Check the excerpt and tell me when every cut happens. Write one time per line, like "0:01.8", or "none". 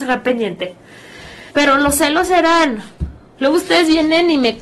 0:01.5
0:03.3